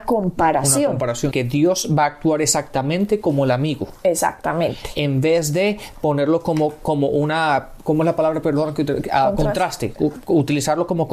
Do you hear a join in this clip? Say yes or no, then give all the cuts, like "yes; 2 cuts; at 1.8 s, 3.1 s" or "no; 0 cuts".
yes; 1 cut; at 1.3 s